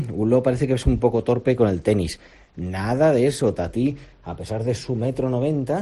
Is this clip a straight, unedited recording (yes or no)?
yes